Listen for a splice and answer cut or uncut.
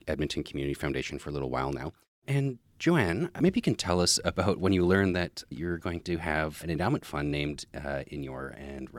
uncut